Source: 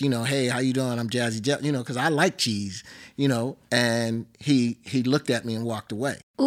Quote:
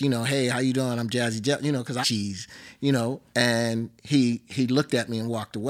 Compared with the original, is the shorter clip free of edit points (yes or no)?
no